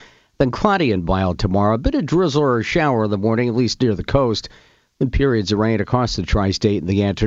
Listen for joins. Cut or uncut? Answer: uncut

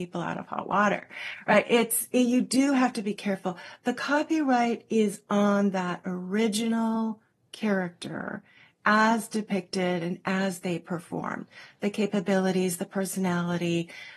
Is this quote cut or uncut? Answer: uncut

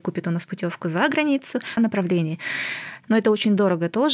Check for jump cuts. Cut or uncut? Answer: cut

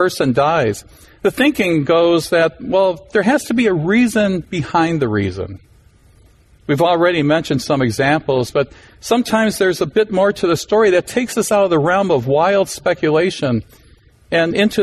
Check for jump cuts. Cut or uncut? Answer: uncut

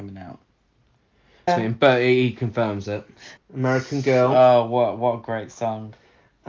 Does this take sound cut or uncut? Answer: cut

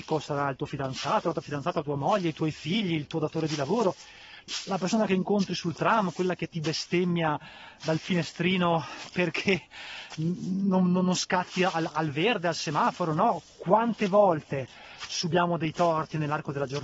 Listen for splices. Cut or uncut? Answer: uncut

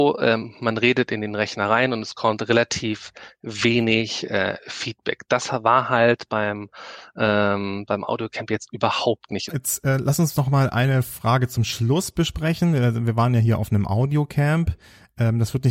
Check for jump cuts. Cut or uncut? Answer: cut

